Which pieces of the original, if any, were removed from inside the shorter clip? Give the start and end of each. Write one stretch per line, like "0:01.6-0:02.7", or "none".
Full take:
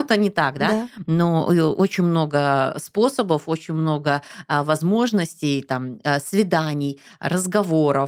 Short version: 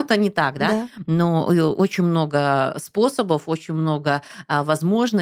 none